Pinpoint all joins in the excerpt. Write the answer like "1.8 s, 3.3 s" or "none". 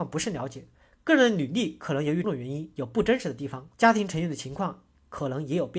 2.2 s, 3.7 s